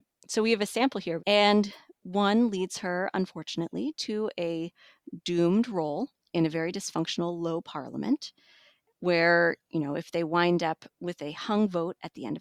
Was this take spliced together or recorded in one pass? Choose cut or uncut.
cut